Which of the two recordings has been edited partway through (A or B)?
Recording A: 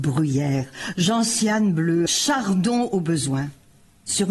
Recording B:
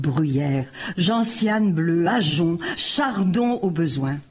A